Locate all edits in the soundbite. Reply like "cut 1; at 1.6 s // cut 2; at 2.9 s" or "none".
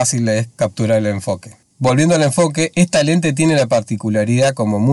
cut 1; at 1.7 s